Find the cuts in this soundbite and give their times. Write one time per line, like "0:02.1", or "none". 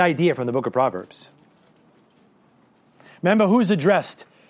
none